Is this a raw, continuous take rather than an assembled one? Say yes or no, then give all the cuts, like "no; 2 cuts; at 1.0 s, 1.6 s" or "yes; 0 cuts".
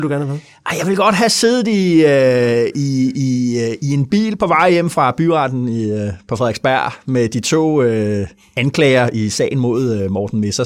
yes; 0 cuts